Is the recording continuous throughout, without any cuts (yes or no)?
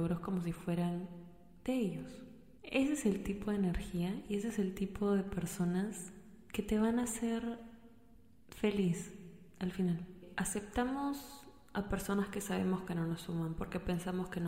yes